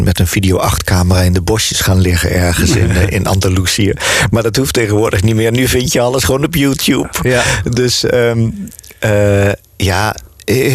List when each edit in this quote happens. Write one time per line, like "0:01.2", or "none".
none